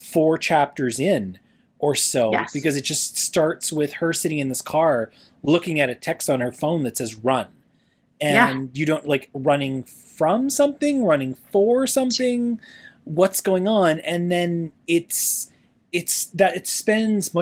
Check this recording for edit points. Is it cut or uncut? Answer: uncut